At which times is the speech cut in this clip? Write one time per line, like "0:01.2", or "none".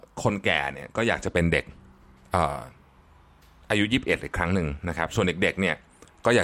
none